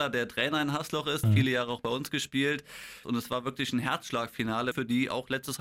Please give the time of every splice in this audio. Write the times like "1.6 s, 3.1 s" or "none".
1.2 s, 3.0 s, 4.7 s